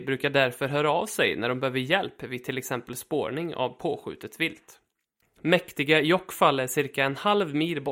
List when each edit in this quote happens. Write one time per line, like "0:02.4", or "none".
0:05.2

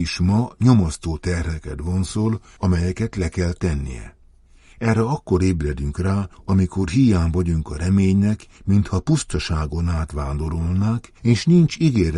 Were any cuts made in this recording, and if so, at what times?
0:08.6

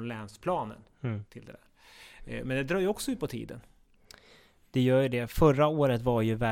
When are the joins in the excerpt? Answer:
none

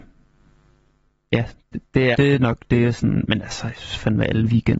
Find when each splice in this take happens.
0:02.1

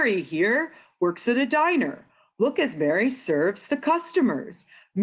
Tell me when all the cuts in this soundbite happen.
none

